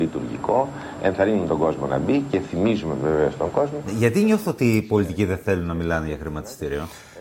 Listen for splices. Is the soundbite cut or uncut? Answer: uncut